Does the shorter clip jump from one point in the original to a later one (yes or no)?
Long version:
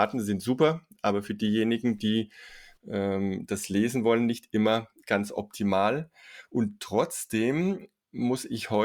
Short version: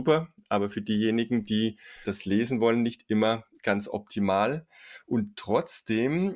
yes